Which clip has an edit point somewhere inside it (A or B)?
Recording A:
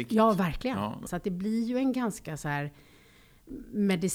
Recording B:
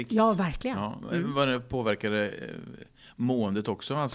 A